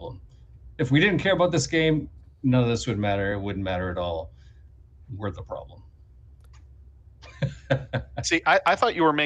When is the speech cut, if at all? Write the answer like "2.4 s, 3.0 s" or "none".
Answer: none